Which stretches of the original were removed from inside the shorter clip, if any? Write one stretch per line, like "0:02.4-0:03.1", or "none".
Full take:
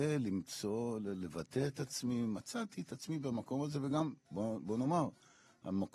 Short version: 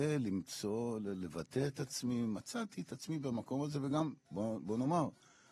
none